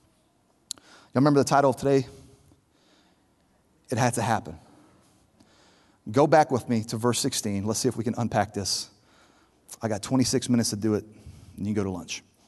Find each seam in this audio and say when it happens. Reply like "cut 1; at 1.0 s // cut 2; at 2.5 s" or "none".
none